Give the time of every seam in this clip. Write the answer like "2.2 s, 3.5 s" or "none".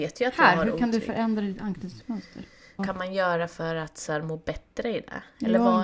2.8 s